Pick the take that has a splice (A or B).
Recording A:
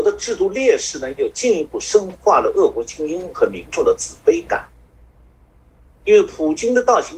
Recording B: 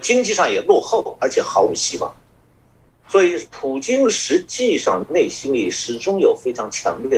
B